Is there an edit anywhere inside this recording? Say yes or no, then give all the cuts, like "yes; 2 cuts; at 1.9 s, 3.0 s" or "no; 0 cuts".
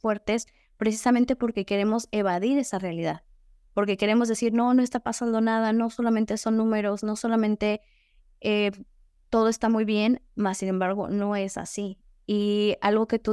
no; 0 cuts